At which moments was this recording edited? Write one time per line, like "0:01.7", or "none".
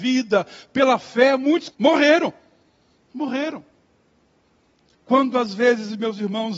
0:01.7